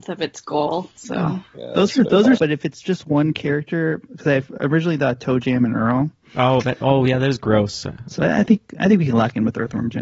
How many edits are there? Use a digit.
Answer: 2